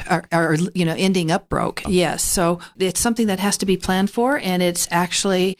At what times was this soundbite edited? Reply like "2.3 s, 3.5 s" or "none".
1.8 s